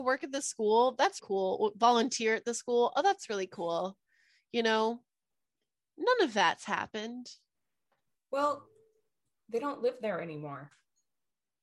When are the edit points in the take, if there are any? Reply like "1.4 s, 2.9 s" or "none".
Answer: 1.2 s